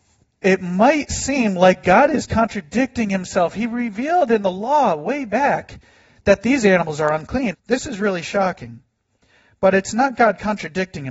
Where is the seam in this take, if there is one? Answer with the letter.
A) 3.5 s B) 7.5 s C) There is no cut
B